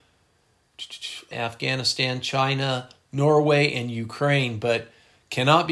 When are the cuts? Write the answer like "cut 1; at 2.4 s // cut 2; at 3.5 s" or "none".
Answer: cut 1; at 1.3 s

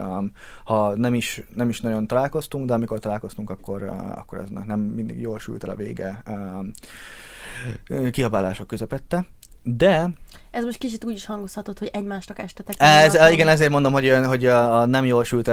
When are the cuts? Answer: none

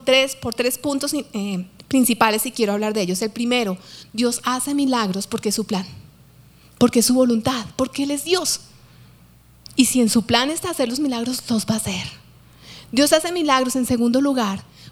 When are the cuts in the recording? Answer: none

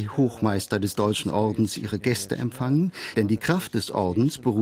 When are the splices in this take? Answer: cut 1; at 3.1 s

